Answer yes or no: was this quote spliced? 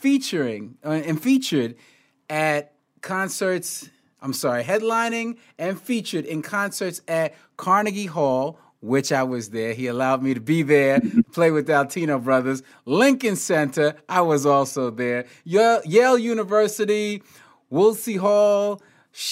no